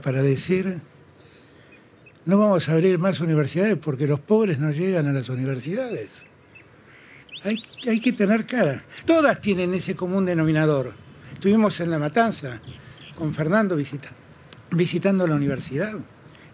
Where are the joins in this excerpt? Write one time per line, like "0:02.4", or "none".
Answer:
0:09.0